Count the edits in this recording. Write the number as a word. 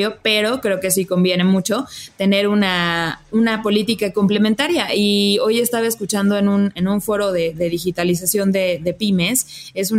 zero